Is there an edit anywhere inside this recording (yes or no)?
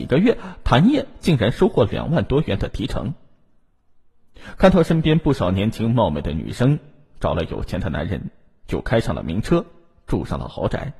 no